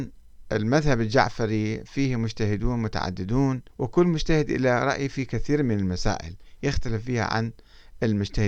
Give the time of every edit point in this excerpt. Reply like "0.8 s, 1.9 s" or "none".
3.7 s